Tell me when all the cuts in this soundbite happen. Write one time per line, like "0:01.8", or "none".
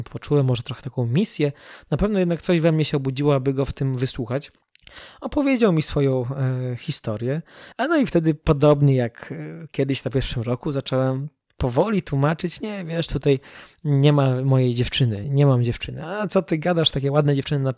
0:07.7
0:15.2